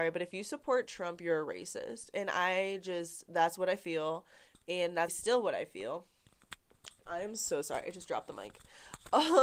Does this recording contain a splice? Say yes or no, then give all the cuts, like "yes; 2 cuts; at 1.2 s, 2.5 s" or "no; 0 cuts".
yes; 2 cuts; at 5.1 s, 7.1 s